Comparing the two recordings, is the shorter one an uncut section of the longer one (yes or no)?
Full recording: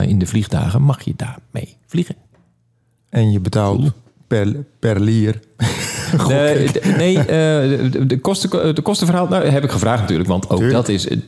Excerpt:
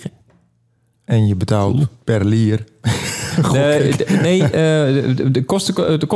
no